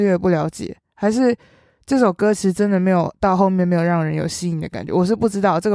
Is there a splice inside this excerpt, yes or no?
no